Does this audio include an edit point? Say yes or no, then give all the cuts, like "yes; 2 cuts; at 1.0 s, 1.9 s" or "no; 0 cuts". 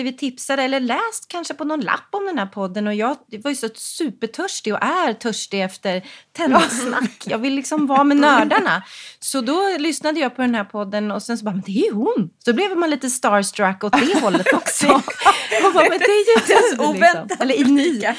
no; 0 cuts